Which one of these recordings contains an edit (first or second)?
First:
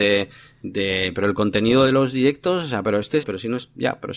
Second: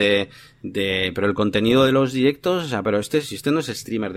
first